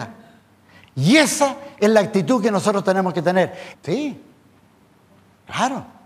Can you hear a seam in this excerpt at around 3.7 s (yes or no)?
yes